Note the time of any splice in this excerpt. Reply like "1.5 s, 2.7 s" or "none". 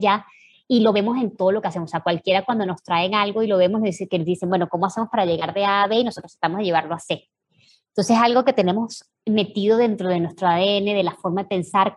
1.3 s